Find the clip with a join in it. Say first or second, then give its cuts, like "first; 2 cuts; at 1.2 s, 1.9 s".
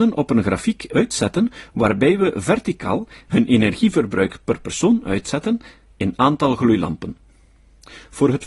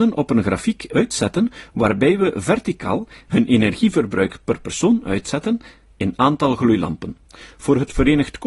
second; 1 cut; at 7.2 s